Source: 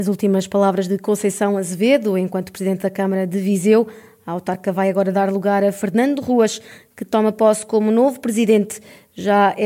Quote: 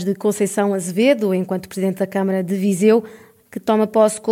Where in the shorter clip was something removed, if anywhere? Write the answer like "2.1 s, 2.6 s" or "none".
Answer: 3.4 s